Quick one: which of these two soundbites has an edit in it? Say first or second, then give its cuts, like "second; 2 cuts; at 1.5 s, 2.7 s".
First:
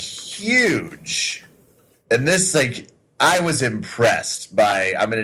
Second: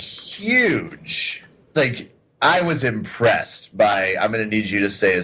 second; 1 cut; at 1.7 s